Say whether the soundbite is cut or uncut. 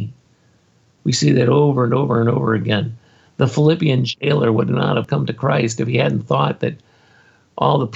cut